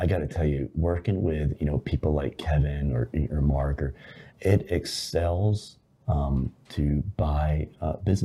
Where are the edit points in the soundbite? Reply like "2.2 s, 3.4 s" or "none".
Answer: 4.3 s, 6.0 s